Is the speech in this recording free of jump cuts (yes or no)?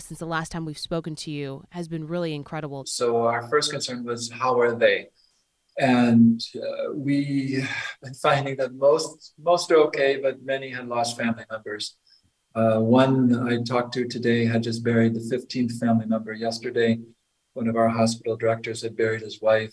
no